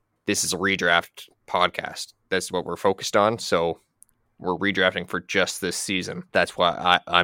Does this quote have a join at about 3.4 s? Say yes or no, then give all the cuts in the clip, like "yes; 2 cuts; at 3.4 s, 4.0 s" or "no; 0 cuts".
no; 1 cut; at 6.3 s